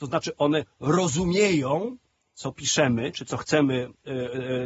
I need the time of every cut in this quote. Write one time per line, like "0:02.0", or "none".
none